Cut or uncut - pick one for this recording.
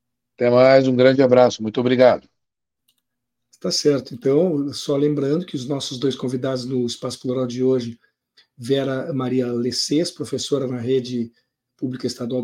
uncut